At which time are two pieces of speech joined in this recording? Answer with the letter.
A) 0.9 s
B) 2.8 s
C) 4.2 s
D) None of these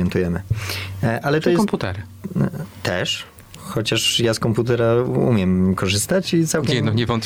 D